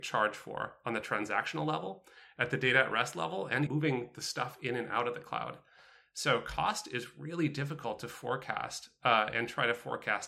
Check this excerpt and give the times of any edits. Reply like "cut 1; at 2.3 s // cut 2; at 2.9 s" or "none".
cut 1; at 3.7 s